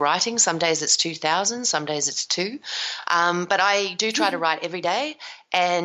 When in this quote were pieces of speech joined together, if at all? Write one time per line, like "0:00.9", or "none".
none